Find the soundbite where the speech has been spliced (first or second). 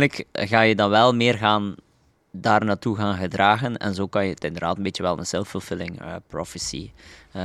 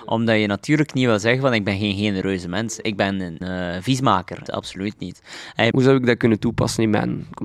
second